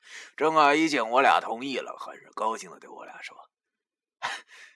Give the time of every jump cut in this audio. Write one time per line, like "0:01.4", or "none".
none